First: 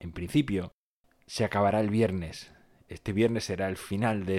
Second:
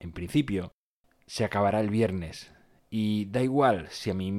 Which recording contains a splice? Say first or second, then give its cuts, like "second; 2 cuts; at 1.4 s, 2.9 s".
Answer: second; 1 cut; at 2.8 s